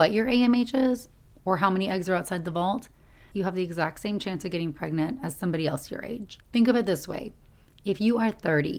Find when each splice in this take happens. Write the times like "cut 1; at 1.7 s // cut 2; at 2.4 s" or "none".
cut 1; at 3.3 s